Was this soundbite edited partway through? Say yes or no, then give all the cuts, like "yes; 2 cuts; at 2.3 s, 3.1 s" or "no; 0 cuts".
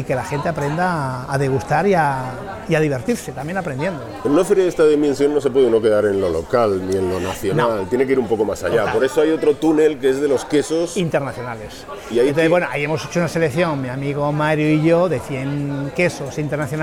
no; 0 cuts